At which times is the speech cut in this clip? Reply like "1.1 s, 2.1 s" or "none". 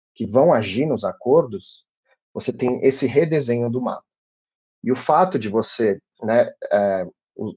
none